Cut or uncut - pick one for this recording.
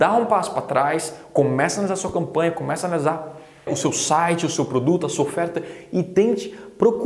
cut